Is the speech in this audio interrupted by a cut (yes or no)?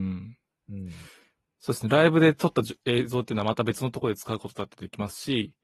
no